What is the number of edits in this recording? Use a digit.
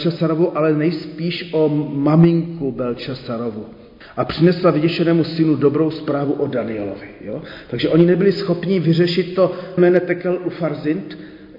1